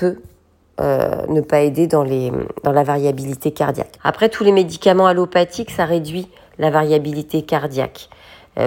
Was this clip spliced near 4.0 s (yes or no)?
yes